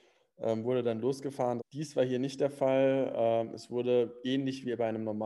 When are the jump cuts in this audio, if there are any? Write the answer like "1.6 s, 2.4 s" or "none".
1.6 s